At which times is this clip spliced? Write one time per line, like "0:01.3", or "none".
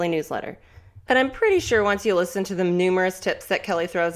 0:01.1